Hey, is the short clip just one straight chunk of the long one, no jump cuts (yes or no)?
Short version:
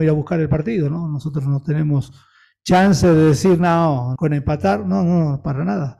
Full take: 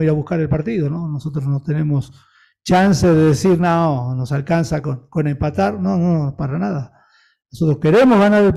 no